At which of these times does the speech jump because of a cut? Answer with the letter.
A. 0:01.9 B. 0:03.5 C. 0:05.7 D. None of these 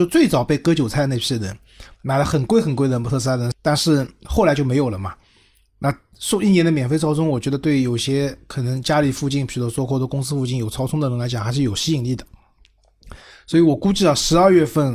B